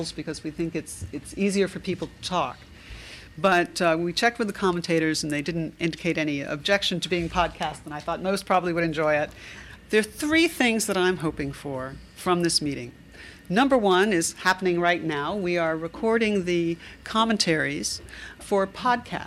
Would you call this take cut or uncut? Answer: cut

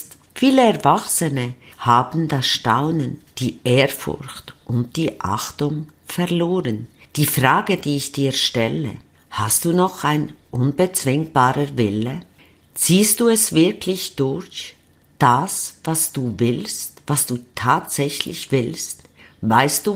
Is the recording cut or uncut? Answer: uncut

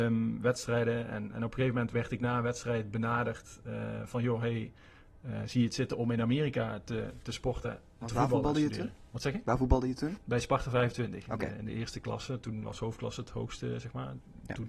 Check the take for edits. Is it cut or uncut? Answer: uncut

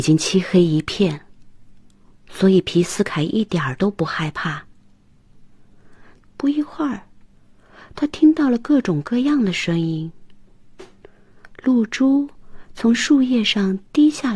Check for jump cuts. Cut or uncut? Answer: cut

